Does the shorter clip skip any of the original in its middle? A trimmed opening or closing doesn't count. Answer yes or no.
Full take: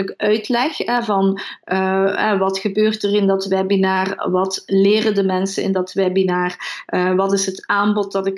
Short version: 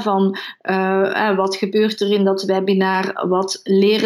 no